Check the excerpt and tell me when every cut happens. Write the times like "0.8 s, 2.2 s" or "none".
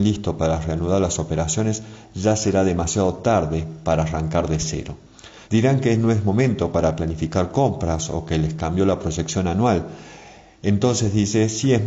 5.4 s